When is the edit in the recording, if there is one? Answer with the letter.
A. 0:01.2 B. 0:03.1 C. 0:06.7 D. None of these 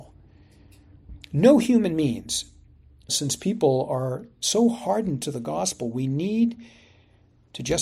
B